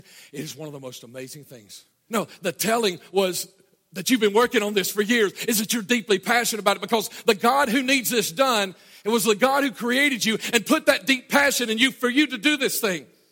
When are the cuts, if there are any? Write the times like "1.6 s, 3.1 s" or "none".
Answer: 2.1 s

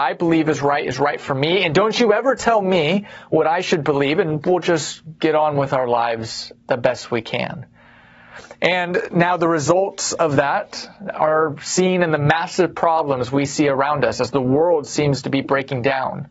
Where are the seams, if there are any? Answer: 4.2 s

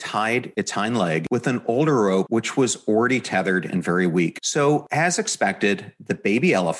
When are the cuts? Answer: none

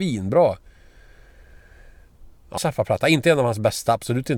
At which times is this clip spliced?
2.6 s

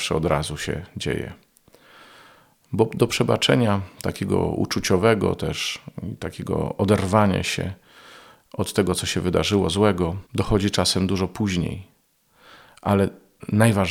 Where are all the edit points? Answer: none

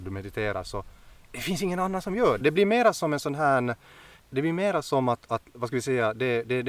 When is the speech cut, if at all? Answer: 2.4 s, 4.2 s

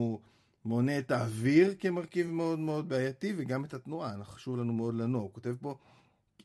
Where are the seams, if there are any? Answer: none

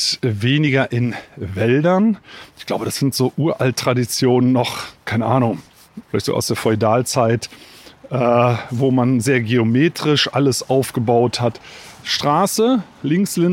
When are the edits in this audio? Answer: 6.0 s, 12.0 s

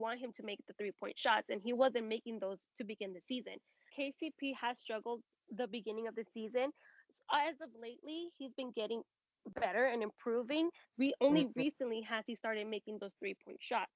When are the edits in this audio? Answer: 3.9 s, 10.8 s

